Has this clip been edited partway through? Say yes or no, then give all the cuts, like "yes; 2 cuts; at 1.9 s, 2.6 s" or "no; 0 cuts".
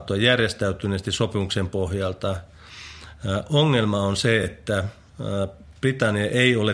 no; 0 cuts